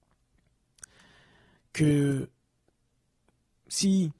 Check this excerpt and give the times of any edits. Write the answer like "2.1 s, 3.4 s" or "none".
1.6 s